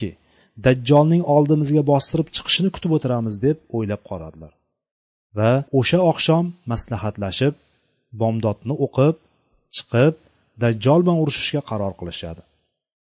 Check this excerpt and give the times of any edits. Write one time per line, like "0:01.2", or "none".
0:05.7